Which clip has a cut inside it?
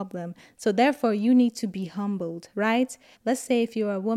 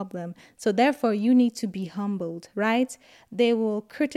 first; 1 cut; at 3.1 s

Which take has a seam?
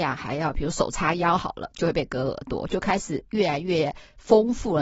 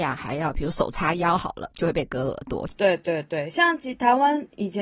second; 1 cut; at 2.7 s

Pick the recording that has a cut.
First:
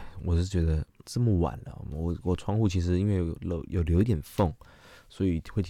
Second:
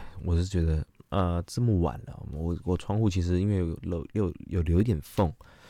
first; 2 cuts; at 1.0 s, 3.7 s

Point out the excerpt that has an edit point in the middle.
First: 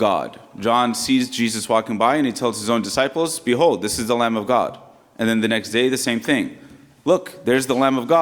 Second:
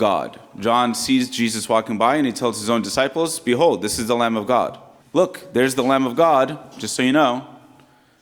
second; 1 cut; at 5.0 s

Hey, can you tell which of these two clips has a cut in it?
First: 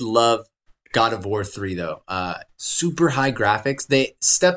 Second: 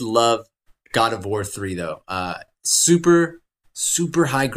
first; 1 cut; at 2.5 s

